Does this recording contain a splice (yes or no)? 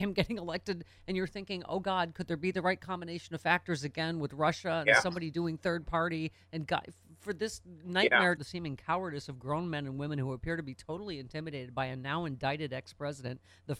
yes